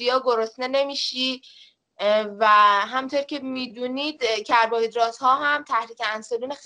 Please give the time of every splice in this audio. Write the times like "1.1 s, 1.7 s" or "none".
none